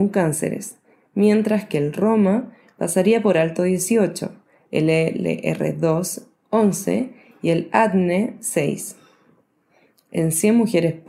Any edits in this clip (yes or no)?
no